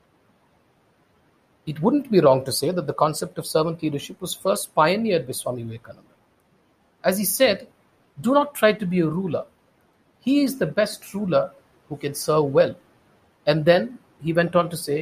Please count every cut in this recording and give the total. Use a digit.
0